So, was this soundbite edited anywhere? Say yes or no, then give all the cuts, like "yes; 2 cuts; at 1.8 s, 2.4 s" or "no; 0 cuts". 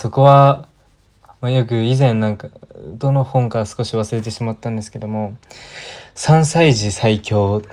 no; 0 cuts